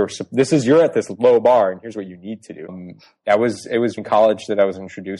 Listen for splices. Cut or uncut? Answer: cut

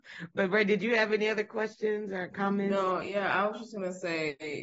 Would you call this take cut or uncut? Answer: uncut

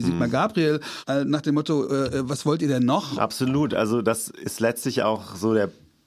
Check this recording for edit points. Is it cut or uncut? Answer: uncut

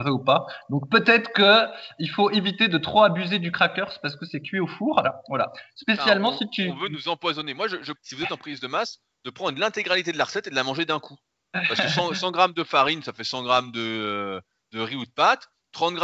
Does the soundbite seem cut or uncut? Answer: cut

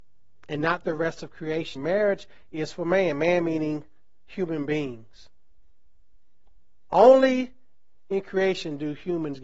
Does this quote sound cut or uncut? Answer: cut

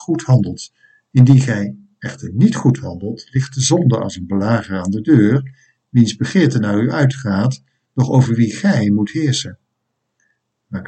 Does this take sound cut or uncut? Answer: uncut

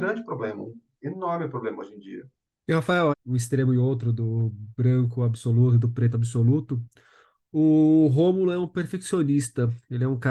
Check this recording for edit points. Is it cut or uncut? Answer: cut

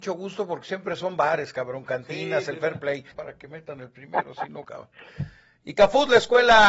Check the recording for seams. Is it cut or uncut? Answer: cut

